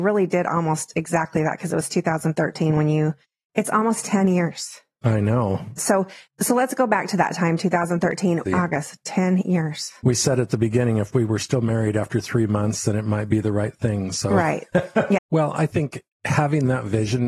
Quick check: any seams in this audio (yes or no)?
yes